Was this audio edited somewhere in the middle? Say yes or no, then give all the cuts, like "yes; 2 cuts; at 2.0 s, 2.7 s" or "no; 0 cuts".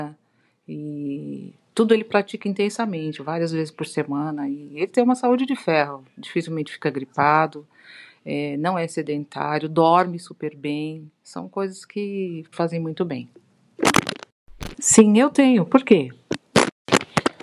yes; 2 cuts; at 12.5 s, 14.7 s